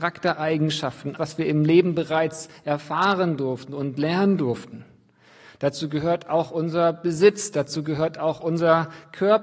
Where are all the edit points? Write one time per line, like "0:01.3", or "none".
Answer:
0:01.2